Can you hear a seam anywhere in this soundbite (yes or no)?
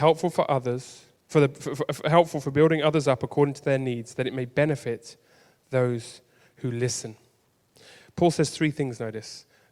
no